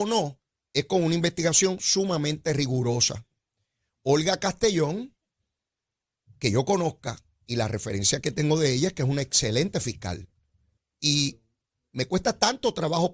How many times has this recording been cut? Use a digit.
1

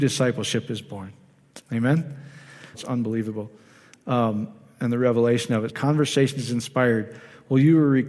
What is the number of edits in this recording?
2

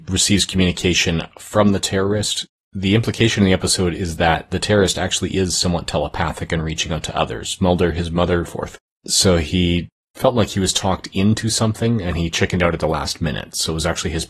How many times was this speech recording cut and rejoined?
1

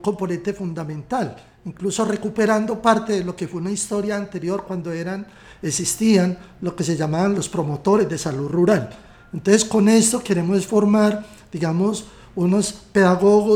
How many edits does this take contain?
0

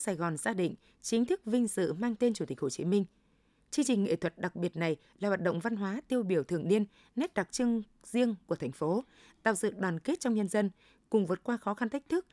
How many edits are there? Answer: 0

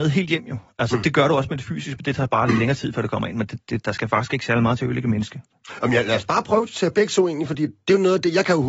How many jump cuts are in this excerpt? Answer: 0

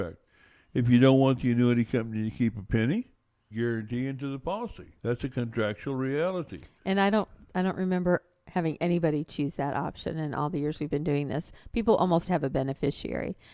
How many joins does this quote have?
3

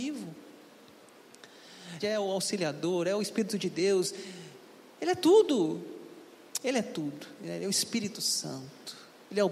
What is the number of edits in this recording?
1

